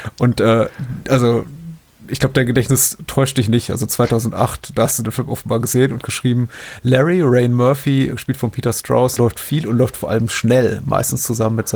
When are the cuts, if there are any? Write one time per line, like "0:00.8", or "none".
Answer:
0:08.1
0:09.2